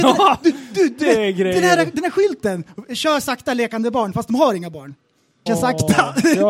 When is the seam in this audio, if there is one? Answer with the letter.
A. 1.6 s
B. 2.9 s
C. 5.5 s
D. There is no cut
C